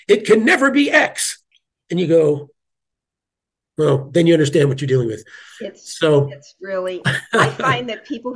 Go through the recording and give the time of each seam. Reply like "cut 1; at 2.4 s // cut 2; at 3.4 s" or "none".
none